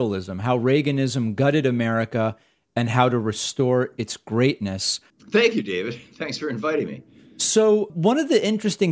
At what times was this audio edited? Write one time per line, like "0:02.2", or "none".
0:05.1
0:07.9